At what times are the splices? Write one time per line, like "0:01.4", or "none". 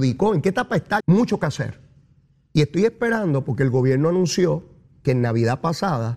0:01.0